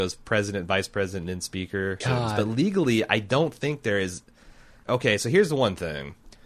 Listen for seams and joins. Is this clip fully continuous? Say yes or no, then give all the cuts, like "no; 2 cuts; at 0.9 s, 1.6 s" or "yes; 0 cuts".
no; 2 cuts; at 2.0 s, 4.8 s